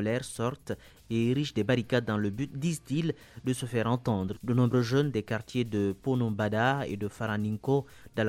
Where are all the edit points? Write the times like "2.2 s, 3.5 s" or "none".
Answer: 4.3 s